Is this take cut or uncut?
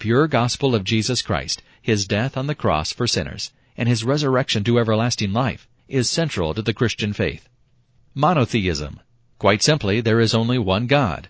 uncut